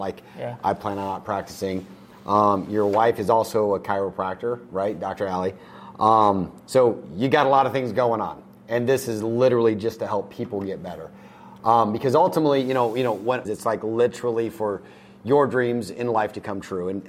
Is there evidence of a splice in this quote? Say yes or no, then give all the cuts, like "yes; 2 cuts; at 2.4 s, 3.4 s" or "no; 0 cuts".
yes; 1 cut; at 13.4 s